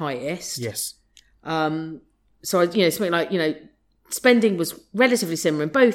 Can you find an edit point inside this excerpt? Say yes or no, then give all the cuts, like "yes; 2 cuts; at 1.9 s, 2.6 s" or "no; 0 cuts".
no; 0 cuts